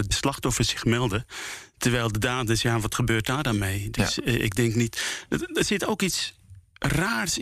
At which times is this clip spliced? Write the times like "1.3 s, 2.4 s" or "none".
none